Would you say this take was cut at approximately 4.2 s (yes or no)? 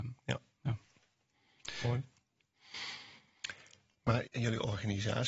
yes